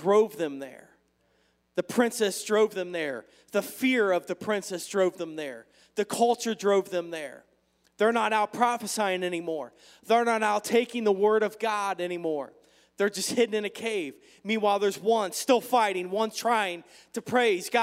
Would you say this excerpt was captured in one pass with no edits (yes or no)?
yes